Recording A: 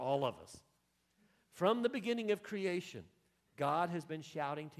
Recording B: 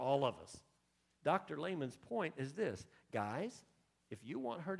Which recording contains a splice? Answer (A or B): B